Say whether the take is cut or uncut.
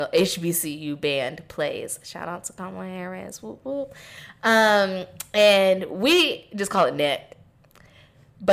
uncut